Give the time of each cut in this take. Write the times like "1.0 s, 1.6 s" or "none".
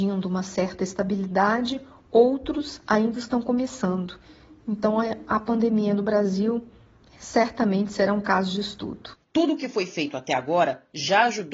9.2 s

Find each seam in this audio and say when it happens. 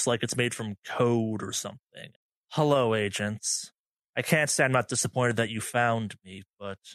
none

